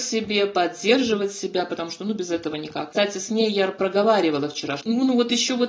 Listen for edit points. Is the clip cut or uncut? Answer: cut